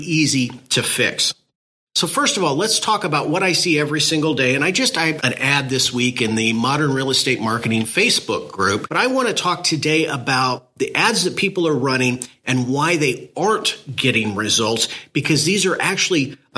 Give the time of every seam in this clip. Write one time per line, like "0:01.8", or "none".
0:05.2
0:08.9